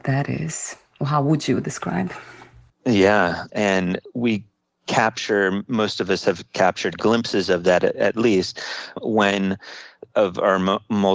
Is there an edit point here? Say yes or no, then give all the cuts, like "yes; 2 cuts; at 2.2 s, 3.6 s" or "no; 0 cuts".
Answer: yes; 1 cut; at 3.5 s